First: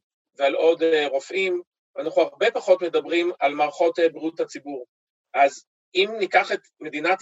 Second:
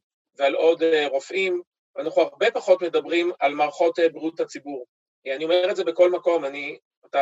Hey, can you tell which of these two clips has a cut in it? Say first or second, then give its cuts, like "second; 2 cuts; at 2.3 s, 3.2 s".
second; 1 cut; at 5.1 s